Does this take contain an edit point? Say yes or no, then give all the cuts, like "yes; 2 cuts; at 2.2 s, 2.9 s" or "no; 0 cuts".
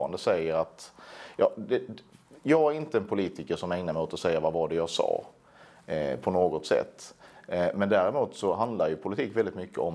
no; 0 cuts